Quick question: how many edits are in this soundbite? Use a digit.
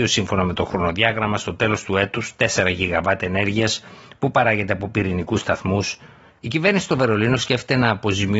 1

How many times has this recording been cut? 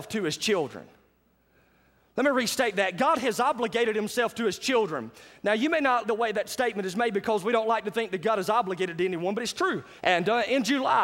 2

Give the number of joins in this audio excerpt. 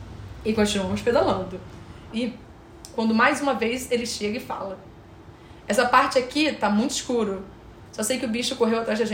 2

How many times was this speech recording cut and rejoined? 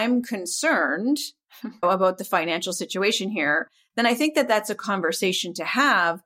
1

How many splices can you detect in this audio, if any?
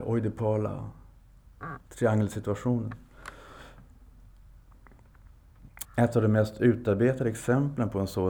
1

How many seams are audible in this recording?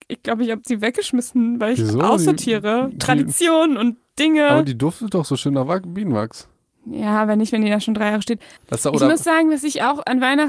1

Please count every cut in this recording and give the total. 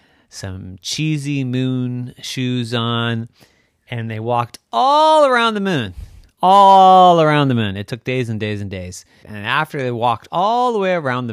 1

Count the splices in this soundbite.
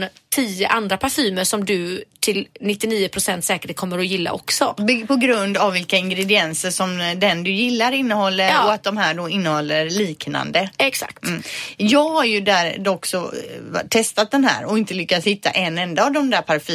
0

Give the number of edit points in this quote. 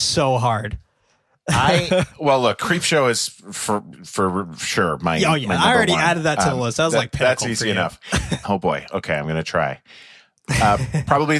1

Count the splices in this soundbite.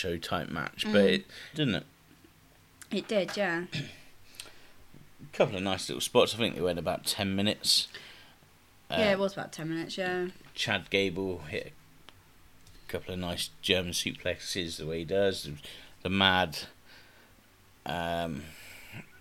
1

